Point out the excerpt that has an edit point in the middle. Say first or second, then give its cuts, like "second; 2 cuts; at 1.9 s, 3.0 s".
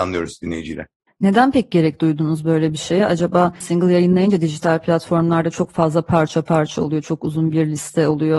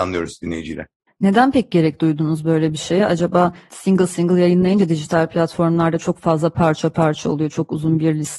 first; 1 cut; at 3.6 s